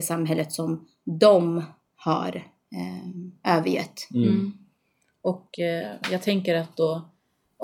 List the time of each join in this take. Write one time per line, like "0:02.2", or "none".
none